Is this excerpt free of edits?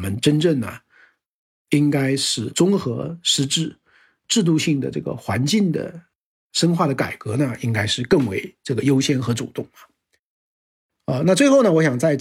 yes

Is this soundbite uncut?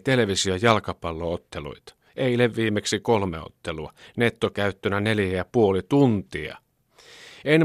yes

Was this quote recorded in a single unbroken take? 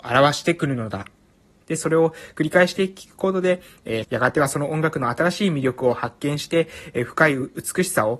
no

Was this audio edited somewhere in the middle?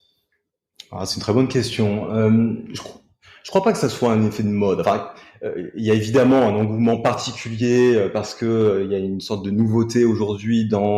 no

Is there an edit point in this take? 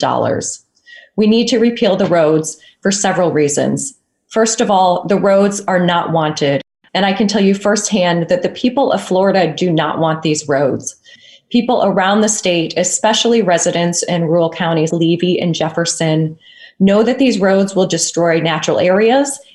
yes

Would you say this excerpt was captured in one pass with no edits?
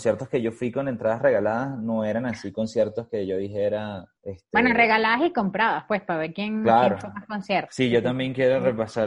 no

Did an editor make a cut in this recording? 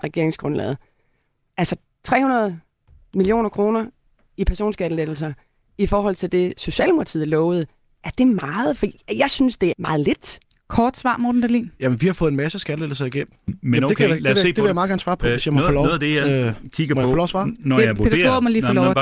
yes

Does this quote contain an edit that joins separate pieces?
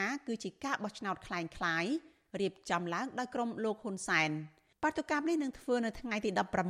no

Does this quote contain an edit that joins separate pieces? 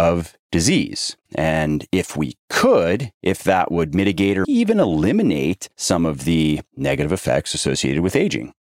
yes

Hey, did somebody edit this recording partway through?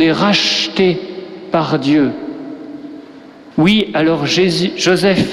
yes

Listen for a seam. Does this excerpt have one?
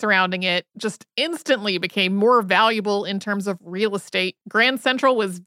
yes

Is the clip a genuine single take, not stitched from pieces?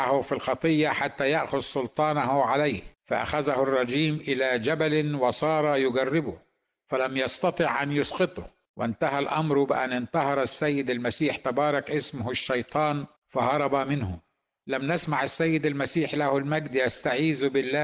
no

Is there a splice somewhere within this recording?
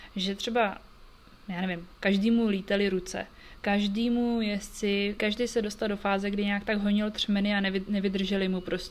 yes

